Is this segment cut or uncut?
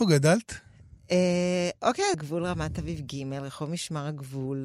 cut